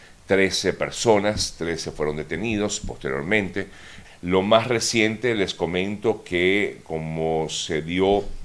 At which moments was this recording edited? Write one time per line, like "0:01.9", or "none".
0:04.0